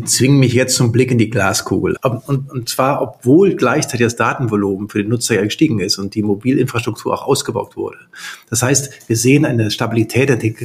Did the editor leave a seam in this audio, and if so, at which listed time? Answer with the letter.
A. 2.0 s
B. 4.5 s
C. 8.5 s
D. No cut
A